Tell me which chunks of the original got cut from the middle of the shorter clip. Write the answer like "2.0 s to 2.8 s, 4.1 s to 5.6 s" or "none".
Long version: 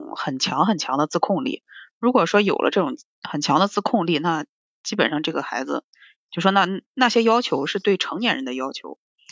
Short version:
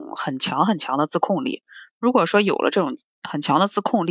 none